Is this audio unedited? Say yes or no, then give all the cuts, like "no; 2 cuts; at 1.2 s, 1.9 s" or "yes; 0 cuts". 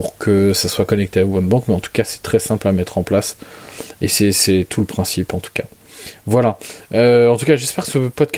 yes; 0 cuts